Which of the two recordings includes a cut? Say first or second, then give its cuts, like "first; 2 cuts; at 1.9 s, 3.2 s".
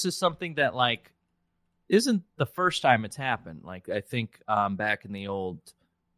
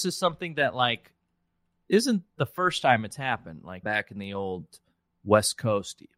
second; 1 cut; at 3.8 s